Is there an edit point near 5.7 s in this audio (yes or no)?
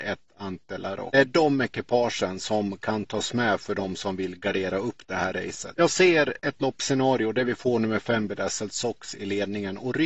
no